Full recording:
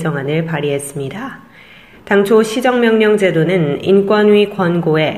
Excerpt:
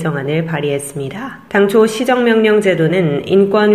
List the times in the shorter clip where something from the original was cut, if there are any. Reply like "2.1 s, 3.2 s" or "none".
1.5 s